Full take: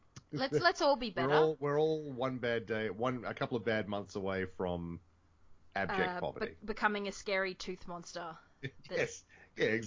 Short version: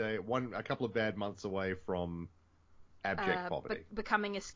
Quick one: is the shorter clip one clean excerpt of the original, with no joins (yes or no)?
yes